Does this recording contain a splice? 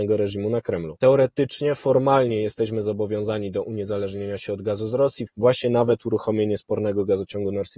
yes; 2 cuts; at 1.0 s, 5.3 s

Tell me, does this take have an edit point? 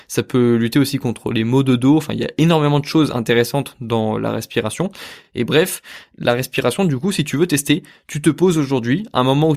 no; 0 cuts

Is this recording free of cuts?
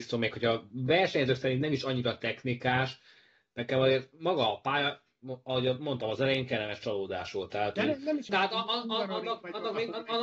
no; 1 cut; at 8.3 s

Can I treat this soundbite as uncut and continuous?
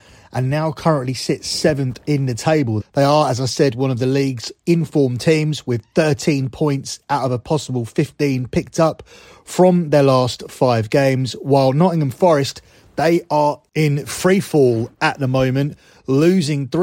no; 1 cut; at 2.8 s

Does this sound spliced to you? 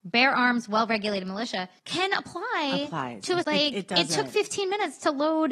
yes; 2 cuts; at 1.8 s, 3.4 s

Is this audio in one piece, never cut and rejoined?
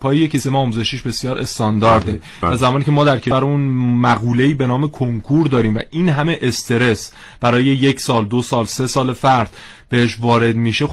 yes; 0 cuts

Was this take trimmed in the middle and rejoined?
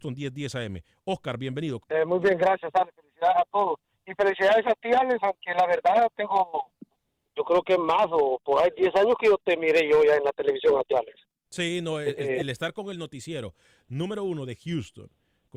yes; 2 cuts; at 1.8 s, 10.9 s

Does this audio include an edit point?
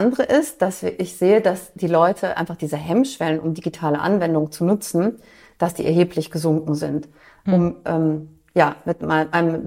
yes; 1 cut; at 7.5 s

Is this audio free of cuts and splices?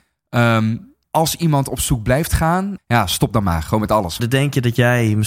no; 3 cuts; at 1.0 s, 2.8 s, 4.2 s

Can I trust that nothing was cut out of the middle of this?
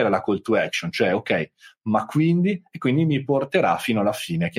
yes; 0 cuts

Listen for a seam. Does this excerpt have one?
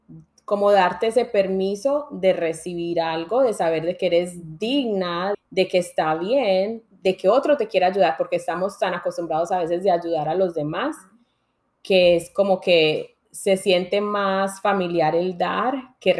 yes; 1 cut; at 5.3 s

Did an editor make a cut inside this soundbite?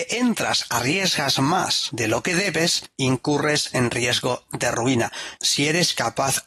yes; 1 cut; at 5.4 s

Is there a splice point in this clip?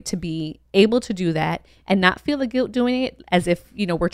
no; 0 cuts

